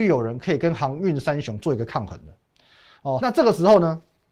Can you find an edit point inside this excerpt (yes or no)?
yes